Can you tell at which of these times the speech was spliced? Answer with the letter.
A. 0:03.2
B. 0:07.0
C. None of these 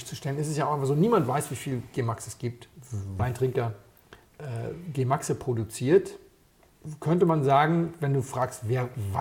A